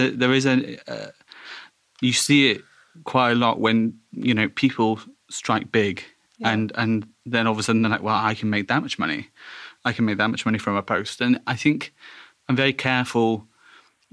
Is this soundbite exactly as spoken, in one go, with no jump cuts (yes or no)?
yes